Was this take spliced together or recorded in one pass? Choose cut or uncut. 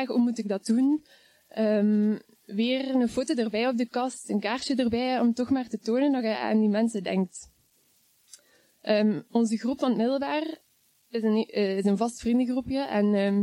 uncut